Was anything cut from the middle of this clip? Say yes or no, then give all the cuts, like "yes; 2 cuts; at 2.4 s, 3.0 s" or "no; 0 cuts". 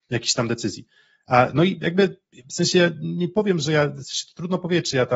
no; 0 cuts